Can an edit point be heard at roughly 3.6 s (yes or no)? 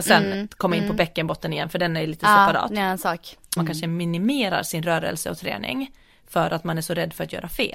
yes